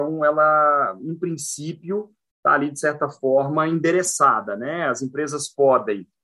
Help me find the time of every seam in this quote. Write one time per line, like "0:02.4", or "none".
none